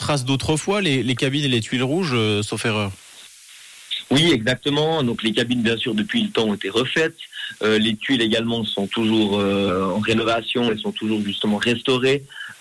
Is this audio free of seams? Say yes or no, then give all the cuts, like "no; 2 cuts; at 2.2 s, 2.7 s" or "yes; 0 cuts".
no; 1 cut; at 8.7 s